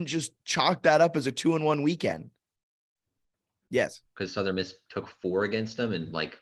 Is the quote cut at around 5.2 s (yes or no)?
no